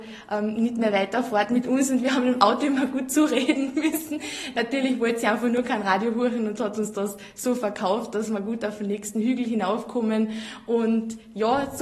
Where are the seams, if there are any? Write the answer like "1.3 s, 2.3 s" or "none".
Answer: none